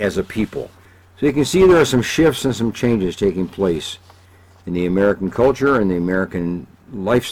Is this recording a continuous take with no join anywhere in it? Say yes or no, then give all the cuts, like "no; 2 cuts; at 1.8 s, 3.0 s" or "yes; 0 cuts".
yes; 0 cuts